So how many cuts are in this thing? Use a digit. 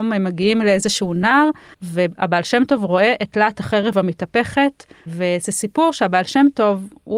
2